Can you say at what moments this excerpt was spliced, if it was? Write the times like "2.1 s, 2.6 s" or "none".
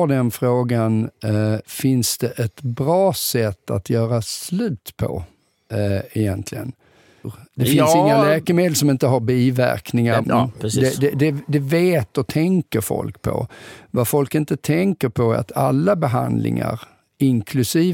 7.2 s, 10.2 s